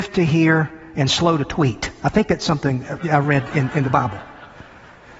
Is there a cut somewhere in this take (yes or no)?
yes